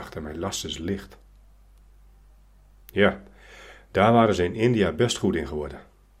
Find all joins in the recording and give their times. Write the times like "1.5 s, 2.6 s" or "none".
2.8 s